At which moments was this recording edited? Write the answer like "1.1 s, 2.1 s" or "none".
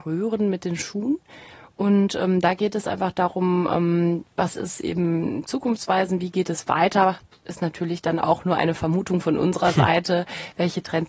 none